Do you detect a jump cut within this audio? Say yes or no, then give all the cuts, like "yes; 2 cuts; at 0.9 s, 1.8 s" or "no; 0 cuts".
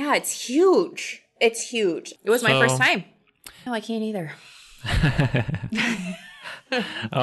yes; 2 cuts; at 2.2 s, 3.7 s